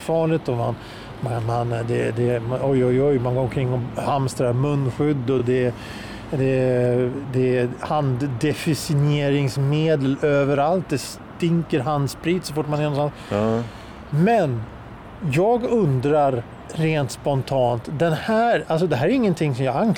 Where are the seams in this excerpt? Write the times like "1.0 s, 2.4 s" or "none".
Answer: none